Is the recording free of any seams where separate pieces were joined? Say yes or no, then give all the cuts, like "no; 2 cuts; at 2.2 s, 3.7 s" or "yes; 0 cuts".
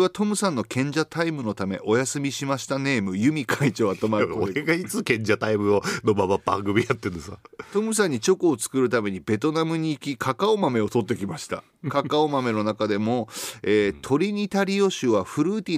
yes; 0 cuts